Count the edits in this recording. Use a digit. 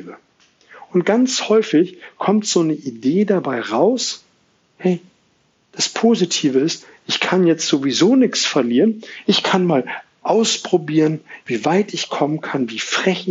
2